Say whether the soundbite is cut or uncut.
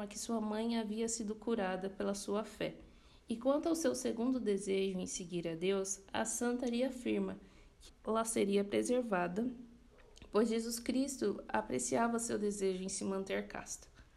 cut